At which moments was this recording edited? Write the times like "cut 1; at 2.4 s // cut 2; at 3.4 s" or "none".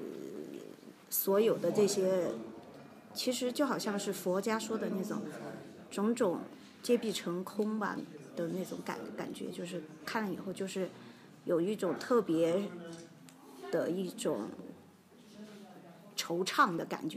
cut 1; at 1.0 s